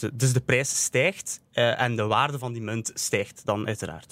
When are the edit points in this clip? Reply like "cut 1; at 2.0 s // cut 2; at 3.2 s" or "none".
none